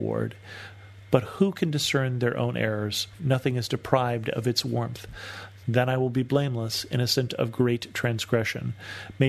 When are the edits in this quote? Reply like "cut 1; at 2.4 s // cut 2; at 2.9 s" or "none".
cut 1; at 3.2 s // cut 2; at 5.6 s

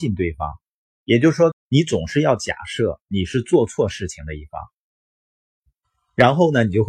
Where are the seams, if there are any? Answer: cut 1; at 1.5 s

